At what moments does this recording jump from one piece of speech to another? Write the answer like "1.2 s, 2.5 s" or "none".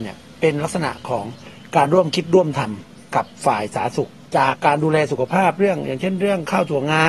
4.5 s